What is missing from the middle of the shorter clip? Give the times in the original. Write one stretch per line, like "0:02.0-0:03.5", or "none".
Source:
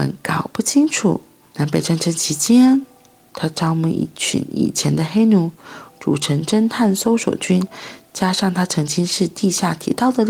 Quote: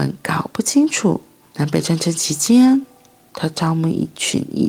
none